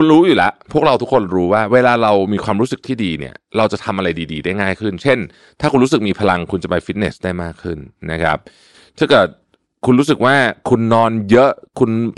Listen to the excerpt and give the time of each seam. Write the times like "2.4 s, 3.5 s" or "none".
none